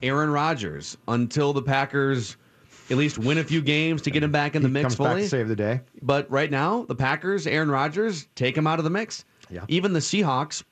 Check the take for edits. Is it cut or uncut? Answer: cut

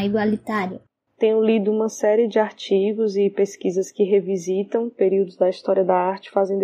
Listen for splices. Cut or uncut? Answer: cut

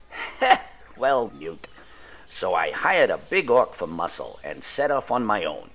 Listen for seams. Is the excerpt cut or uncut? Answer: cut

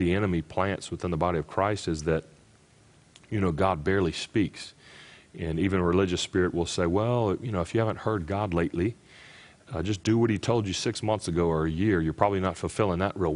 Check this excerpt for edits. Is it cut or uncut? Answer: uncut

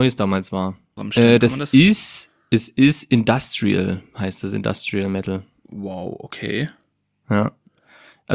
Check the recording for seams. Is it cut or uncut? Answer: cut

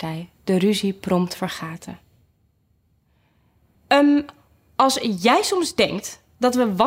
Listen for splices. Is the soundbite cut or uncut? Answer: cut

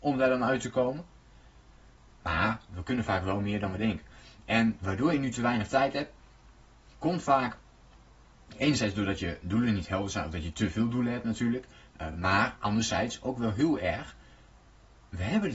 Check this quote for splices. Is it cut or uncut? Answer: uncut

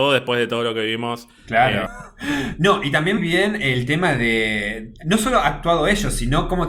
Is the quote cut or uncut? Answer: cut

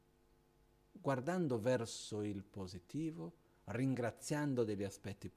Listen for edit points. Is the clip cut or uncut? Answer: cut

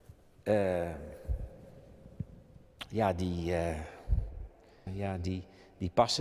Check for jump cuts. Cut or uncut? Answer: cut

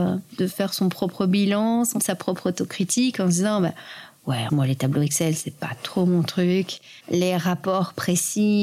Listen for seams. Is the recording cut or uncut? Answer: cut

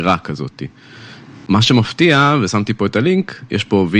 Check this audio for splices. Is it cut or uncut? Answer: uncut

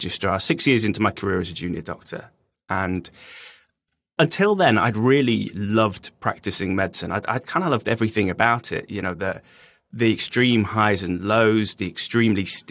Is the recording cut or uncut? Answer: uncut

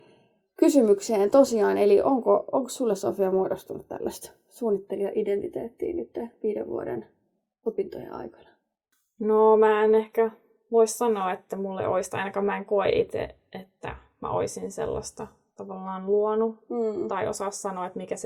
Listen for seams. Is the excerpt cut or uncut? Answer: uncut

